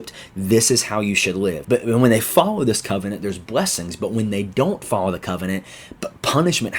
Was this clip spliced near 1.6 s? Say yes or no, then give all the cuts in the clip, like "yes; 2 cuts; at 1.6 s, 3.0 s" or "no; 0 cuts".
yes; 1 cut; at 1.6 s